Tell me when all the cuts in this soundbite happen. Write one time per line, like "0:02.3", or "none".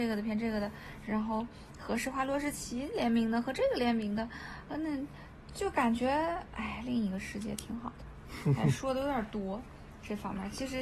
0:05.5